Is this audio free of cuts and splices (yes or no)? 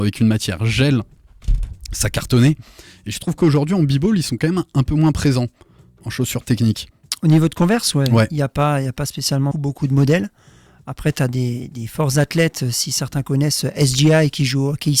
no